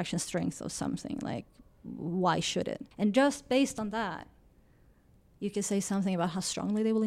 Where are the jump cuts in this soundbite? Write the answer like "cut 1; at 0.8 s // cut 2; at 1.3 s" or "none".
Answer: cut 1; at 2.9 s